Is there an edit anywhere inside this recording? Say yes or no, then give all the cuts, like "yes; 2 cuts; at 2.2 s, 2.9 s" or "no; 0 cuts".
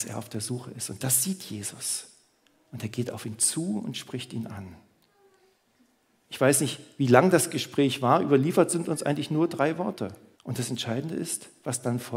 yes; 1 cut; at 10.3 s